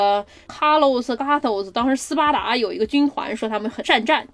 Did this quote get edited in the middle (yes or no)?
yes